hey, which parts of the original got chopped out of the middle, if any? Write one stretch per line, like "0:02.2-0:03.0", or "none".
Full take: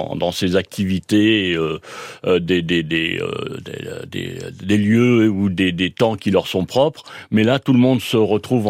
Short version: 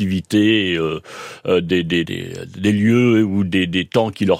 0:02.8-0:04.1

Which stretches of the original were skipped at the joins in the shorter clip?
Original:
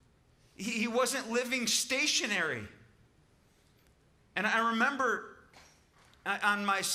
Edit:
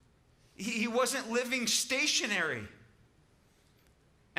none

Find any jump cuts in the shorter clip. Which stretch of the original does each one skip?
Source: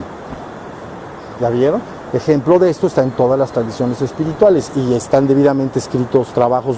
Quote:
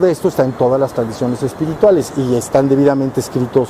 none

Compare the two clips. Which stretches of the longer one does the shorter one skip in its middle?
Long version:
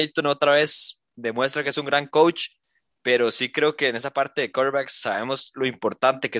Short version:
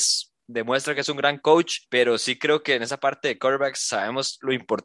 0:02.5-0:03.0

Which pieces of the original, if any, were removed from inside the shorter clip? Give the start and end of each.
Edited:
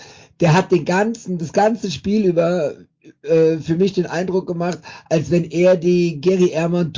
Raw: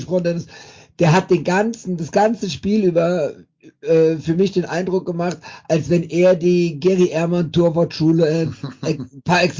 none

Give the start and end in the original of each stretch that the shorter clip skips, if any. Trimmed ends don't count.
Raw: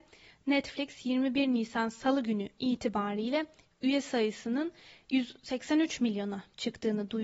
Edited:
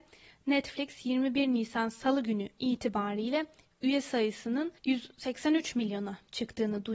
0:04.8-0:05.0

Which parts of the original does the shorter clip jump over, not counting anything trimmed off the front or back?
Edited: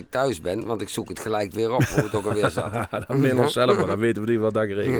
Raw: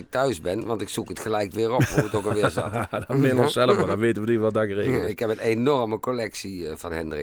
none

